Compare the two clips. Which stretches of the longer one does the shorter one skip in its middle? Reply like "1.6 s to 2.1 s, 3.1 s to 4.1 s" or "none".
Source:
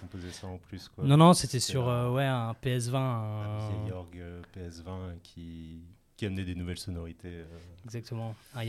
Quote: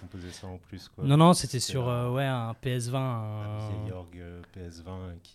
none